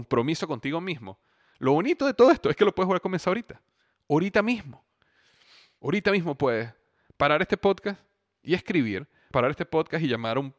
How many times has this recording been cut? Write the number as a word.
two